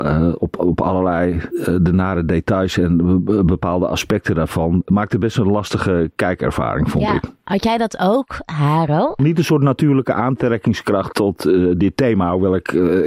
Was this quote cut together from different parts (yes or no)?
yes